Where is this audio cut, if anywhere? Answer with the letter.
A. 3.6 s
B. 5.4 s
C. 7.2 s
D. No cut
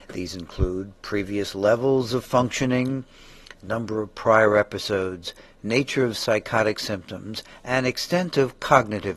D